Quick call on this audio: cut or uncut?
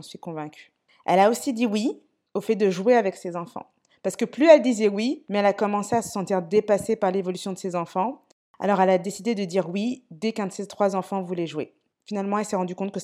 cut